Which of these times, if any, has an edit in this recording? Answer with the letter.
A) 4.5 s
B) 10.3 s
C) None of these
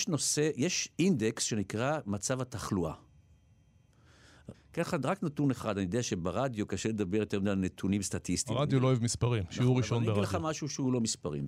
A